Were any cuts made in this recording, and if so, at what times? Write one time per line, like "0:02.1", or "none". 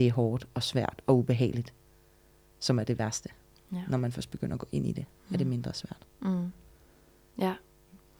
none

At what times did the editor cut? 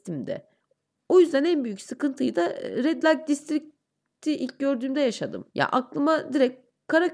0:05.5

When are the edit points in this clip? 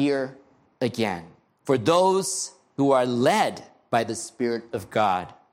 0:01.5

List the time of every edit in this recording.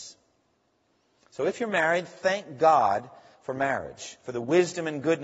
none

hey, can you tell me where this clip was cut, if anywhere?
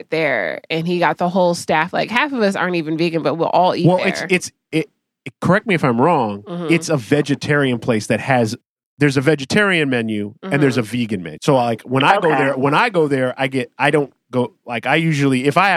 0:11.4

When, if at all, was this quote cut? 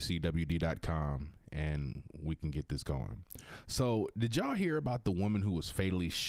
none

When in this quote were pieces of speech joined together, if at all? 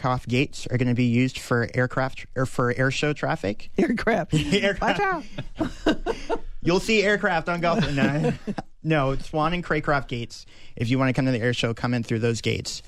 none

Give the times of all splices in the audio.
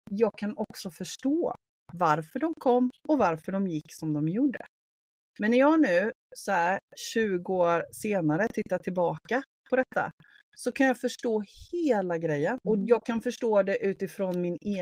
0:05.3
0:12.6

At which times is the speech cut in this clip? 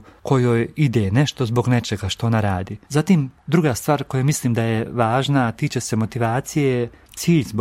0:02.8

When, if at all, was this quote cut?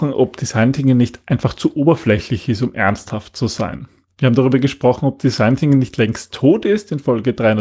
none

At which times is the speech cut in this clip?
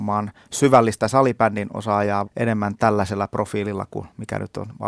0:02.3

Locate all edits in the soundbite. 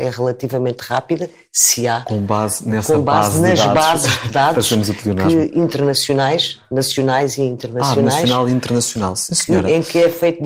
none

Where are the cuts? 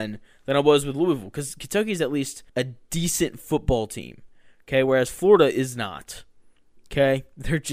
0:02.5

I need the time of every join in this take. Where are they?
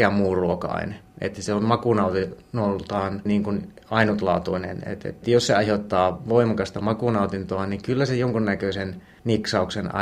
0:03.3

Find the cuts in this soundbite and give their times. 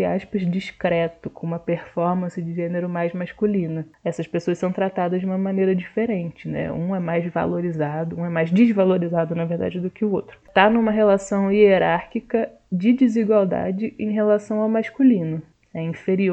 0:10.4

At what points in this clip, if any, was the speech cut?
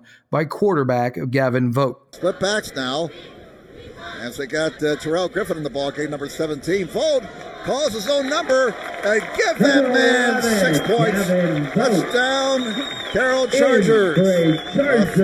none

